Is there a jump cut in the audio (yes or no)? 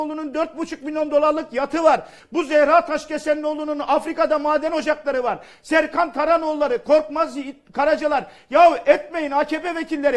yes